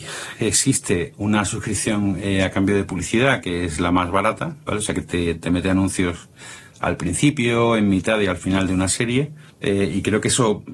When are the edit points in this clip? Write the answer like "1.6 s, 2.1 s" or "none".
9.5 s